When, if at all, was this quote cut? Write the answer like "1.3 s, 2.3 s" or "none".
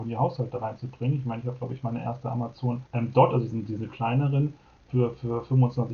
2.9 s